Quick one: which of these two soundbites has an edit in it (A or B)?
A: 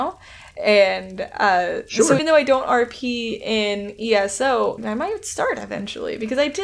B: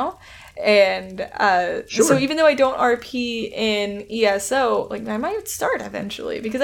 A